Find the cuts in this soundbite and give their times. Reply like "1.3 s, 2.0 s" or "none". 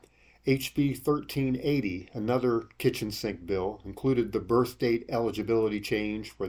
none

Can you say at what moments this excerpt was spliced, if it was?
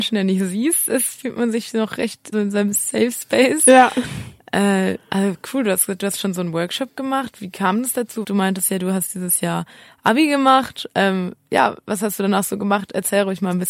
2.3 s, 8.2 s

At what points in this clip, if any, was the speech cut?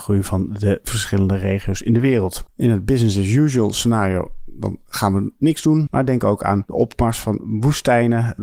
2.5 s, 5.9 s

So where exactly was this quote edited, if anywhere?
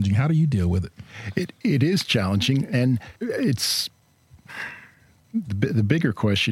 1.6 s, 3.2 s

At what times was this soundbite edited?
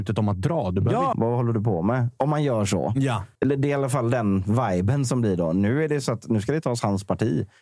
1.1 s, 3.3 s

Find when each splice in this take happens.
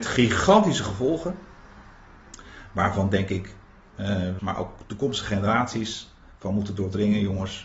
4.4 s

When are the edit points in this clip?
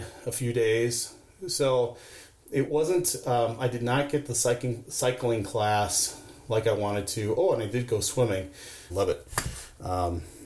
8.9 s

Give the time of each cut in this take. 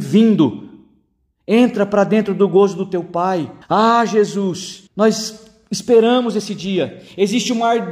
3.6 s, 4.9 s

